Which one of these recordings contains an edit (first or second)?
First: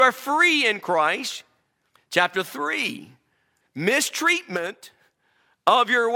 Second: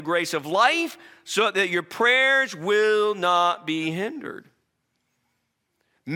first